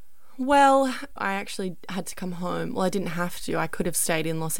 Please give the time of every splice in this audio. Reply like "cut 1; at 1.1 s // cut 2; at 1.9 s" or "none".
cut 1; at 1.2 s